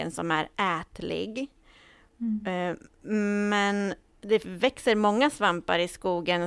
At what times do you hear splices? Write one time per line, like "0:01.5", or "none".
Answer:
none